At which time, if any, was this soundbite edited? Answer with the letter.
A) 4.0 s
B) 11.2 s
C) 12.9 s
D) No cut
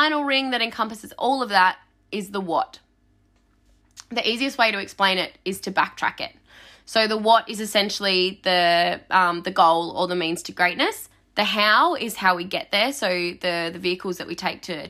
D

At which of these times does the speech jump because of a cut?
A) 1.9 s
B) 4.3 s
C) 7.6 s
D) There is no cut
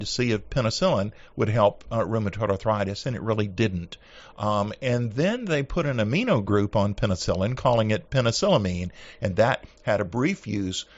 D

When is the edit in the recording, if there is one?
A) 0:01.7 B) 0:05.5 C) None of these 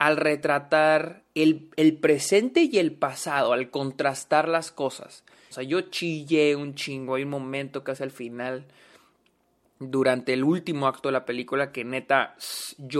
B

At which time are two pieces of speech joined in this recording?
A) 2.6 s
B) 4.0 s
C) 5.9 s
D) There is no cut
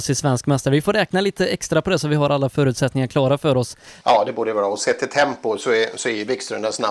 B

